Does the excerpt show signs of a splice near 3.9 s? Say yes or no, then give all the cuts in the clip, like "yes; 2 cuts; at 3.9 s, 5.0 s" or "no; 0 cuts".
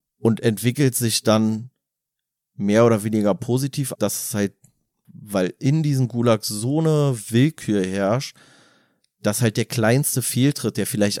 yes; 1 cut; at 3.9 s